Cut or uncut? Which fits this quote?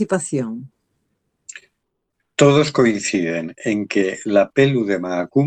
uncut